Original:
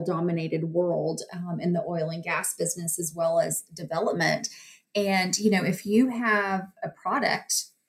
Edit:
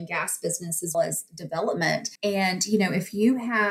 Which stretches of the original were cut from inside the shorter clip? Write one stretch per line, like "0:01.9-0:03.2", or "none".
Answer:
0:03.1-0:03.3
0:04.5-0:04.9

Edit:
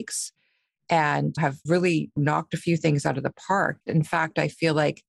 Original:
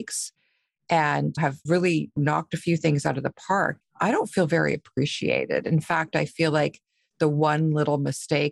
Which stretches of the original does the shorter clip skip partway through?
0:03.9-0:05.6

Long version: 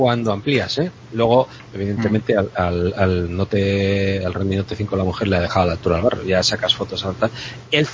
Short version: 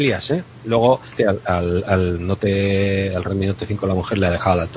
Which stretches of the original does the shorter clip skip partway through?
0:01.6-0:02.3

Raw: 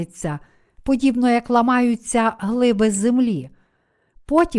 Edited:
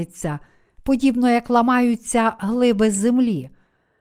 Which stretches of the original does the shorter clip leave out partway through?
none

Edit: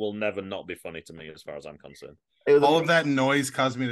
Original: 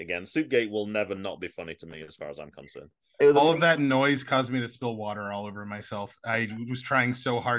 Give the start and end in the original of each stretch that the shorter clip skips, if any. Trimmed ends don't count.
none

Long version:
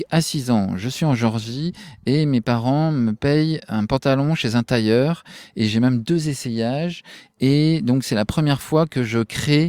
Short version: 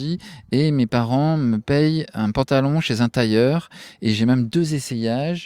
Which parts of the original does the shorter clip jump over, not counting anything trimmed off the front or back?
none

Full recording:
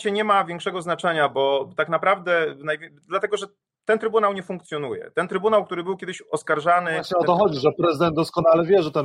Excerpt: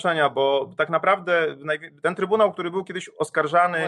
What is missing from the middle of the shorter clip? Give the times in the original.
0:03.0-0:05.1

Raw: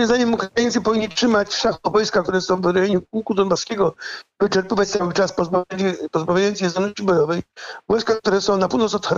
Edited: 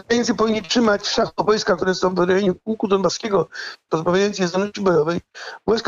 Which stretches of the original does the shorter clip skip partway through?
0:04.4-0:06.1

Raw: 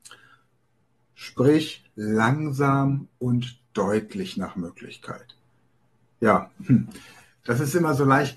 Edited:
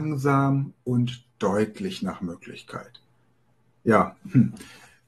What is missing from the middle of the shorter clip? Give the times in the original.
none

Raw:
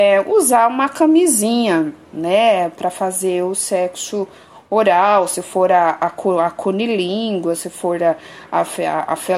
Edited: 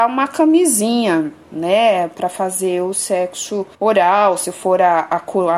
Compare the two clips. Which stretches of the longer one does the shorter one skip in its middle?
0:04.4-0:04.6

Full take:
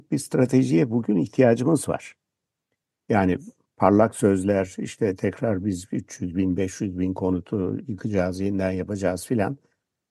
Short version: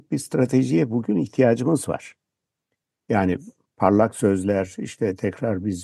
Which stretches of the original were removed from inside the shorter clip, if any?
none

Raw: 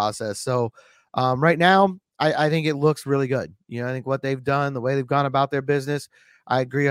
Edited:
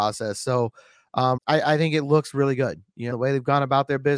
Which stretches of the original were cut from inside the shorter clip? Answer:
0:01.4-0:02.1
0:03.8-0:04.7

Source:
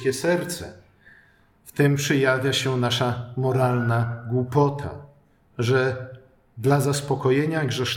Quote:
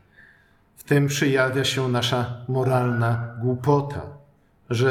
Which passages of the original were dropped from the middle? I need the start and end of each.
none

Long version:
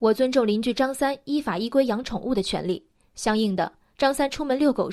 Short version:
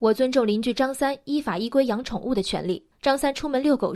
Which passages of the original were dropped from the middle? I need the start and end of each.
0:02.9-0:03.9

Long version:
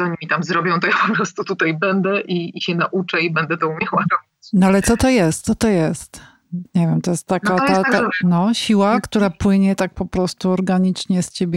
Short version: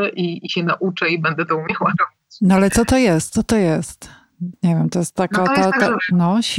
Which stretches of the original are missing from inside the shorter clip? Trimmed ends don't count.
none

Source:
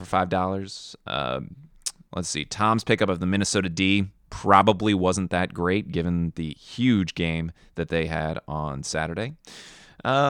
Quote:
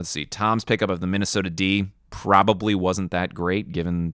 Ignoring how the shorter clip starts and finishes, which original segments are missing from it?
none

